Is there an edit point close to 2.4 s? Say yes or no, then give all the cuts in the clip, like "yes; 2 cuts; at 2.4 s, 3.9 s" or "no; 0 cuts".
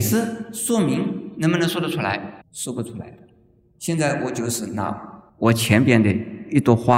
yes; 2 cuts; at 2.4 s, 5.3 s